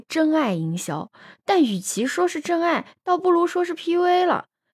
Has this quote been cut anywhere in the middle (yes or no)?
no